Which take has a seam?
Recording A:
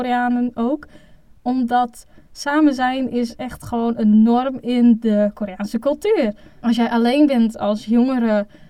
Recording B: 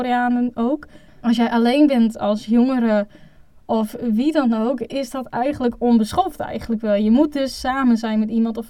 B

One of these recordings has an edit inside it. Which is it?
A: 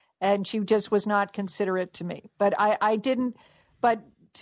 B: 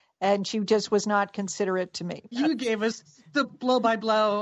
B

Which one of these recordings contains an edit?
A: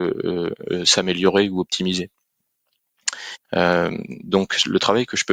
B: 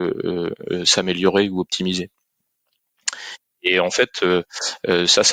A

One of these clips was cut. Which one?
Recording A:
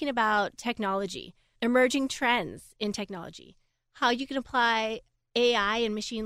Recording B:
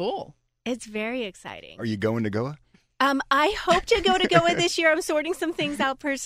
A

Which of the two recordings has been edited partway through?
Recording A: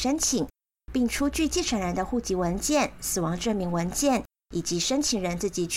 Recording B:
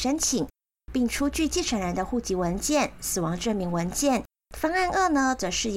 B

